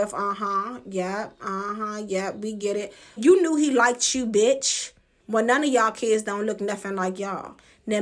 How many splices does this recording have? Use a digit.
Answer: 2